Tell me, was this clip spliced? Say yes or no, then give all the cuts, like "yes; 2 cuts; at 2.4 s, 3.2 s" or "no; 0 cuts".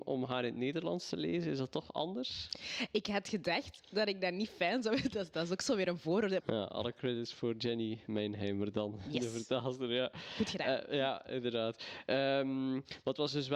yes; 1 cut; at 6.4 s